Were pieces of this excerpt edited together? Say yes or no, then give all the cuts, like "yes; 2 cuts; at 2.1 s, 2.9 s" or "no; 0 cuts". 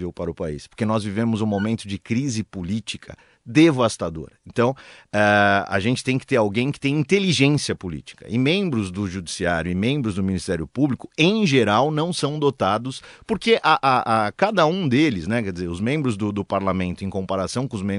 no; 0 cuts